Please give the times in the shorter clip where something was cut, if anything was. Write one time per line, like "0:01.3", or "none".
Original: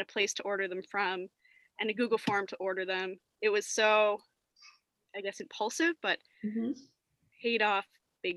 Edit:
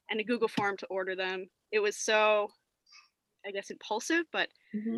none